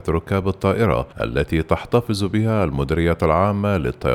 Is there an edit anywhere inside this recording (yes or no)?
yes